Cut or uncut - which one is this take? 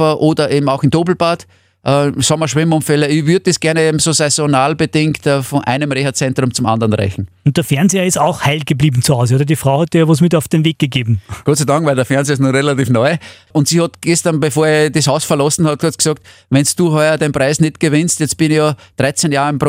uncut